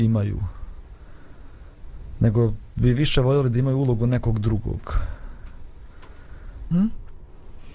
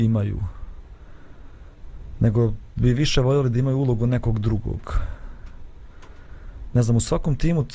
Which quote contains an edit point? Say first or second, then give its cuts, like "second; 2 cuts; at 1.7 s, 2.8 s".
first; 1 cut; at 6.7 s